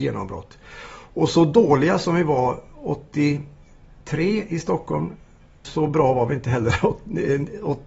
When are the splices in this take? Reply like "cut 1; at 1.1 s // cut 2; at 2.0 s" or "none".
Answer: cut 1; at 5.6 s